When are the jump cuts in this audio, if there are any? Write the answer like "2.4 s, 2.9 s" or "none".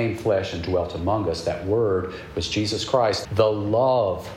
3.2 s

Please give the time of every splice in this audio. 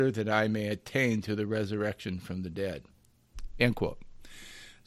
none

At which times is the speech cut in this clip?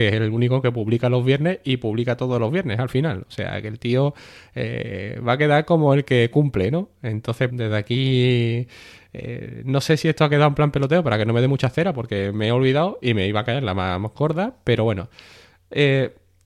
7.5 s

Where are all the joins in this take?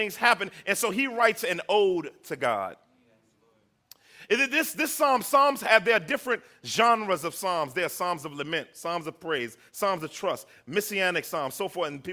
none

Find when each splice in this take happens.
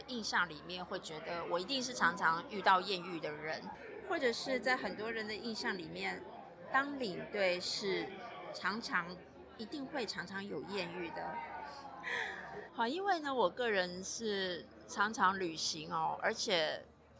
12.7 s

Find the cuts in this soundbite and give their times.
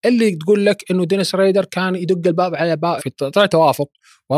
3.0 s

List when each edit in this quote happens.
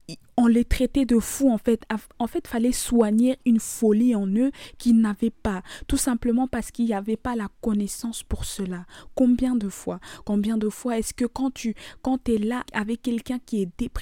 12.6 s

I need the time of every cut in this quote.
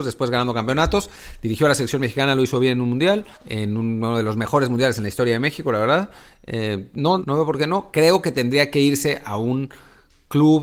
3.3 s, 7.2 s

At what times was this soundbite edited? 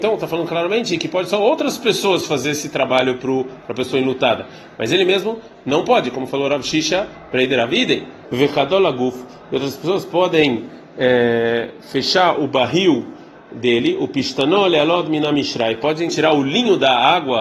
8.2 s, 16.1 s

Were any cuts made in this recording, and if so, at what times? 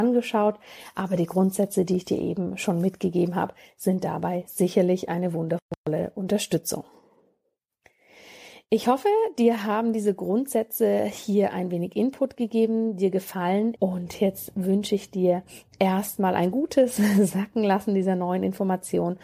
13.8 s

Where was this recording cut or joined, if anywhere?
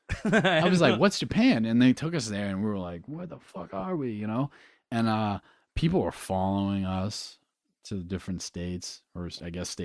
none

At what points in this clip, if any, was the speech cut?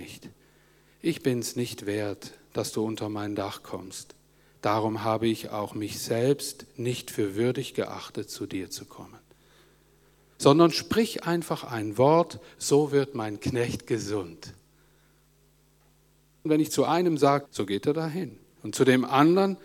16.5 s, 17.5 s

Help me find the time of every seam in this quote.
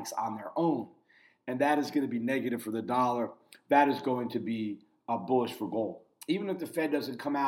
6.2 s

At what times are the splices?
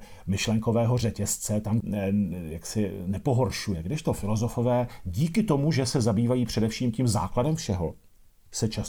1.8 s

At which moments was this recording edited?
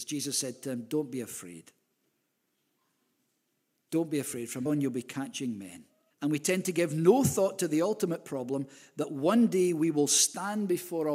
4.7 s, 6.1 s

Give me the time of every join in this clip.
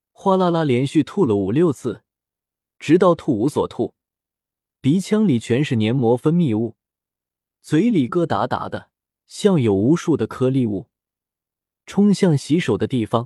8.1 s

